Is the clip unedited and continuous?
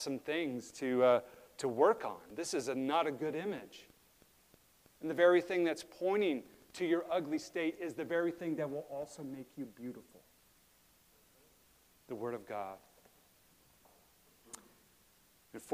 yes; 0 cuts

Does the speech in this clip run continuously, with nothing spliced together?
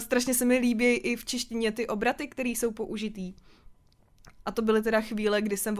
no; 1 cut; at 4.4 s

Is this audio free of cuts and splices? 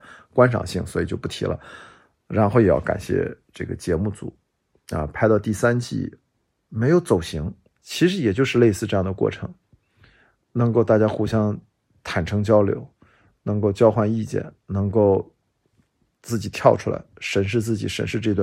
no; 1 cut; at 7.7 s

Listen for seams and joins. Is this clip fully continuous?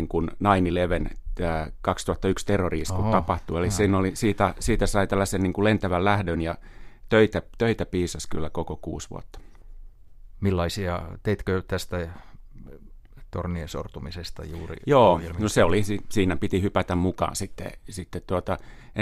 yes; 0 cuts

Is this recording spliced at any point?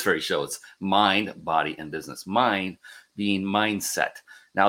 no; 0 cuts

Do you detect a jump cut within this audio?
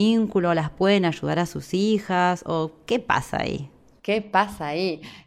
no; 0 cuts

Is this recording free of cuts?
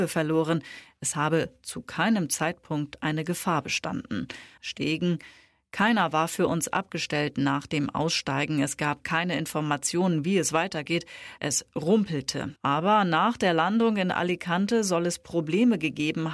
no; 3 cuts; at 4.6 s, 11.4 s, 12.6 s

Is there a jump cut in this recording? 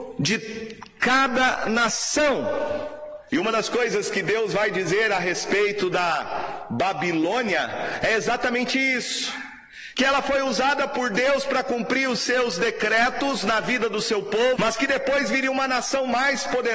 yes; 3 cuts; at 3.3 s, 9.9 s, 14.6 s

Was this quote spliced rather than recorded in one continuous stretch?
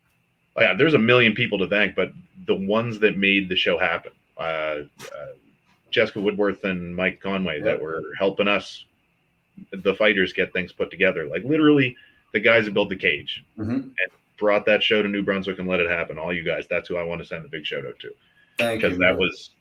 no; 0 cuts

